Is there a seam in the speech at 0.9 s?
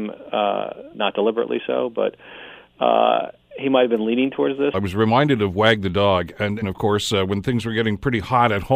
yes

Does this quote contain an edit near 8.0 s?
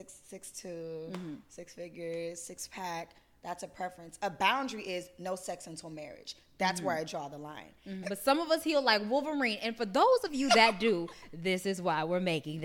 yes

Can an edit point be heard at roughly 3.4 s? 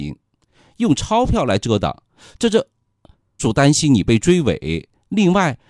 yes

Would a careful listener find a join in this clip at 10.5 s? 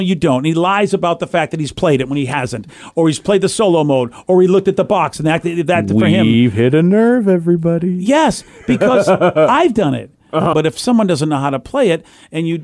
yes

